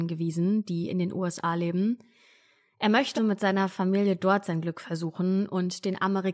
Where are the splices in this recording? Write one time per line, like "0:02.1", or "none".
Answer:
0:03.2